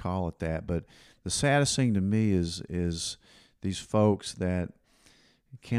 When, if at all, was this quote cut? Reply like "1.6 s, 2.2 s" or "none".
none